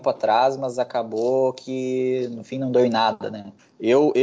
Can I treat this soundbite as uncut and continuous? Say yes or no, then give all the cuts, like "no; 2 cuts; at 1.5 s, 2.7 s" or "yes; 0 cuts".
yes; 0 cuts